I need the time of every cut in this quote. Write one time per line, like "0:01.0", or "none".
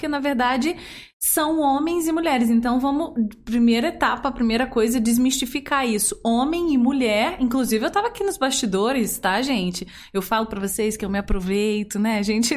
none